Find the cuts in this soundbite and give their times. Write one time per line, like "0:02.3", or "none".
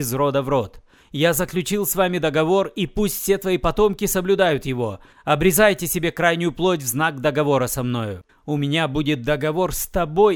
0:05.1
0:08.3